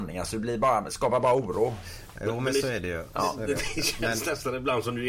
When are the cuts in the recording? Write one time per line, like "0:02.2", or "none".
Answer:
none